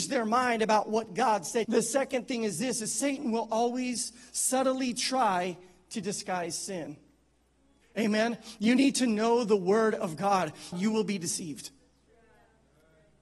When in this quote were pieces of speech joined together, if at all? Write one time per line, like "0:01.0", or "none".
0:01.6
0:07.8
0:10.7